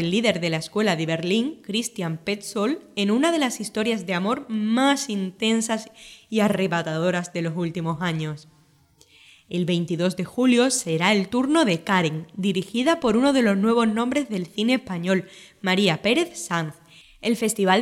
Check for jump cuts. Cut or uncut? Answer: uncut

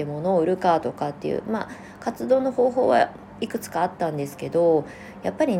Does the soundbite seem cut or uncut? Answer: uncut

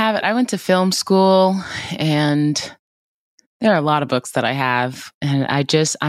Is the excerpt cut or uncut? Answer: uncut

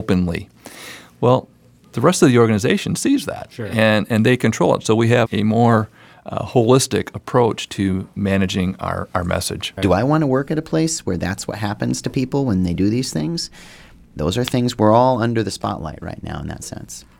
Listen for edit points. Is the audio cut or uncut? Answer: cut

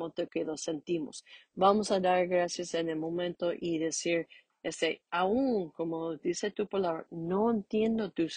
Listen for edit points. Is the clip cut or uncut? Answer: cut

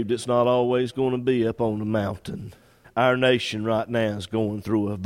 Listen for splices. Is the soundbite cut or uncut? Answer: cut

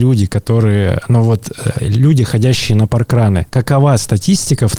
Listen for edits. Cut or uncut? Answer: cut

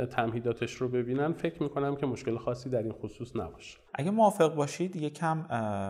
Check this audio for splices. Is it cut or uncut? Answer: cut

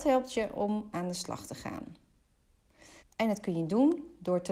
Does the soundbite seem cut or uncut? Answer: cut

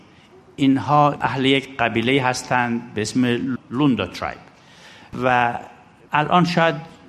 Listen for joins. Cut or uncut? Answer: cut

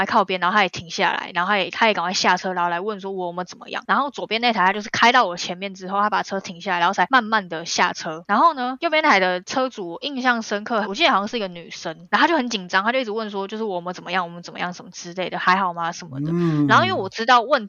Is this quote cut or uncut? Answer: cut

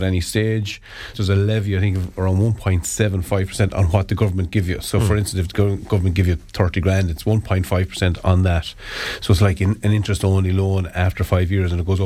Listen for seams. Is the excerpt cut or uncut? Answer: cut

